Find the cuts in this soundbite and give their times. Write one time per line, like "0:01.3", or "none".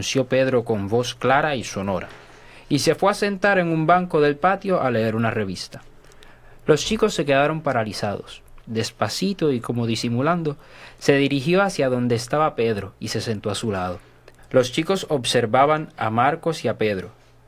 0:08.6
0:14.4